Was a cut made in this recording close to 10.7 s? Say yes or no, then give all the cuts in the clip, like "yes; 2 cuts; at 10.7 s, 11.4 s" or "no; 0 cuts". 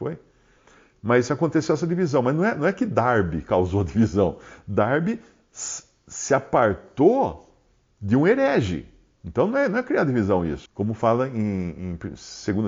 yes; 2 cuts; at 9.2 s, 10.7 s